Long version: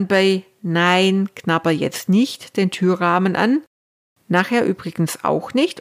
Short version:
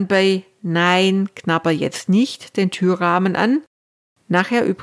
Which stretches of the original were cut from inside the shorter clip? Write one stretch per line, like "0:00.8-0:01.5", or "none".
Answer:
none